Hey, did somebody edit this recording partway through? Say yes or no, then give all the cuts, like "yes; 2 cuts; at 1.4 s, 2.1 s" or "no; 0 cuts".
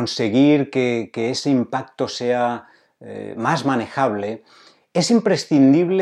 no; 0 cuts